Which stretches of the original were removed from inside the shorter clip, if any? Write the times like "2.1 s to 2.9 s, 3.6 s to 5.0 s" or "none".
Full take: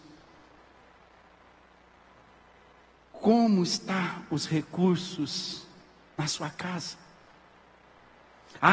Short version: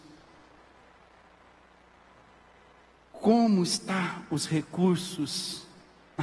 none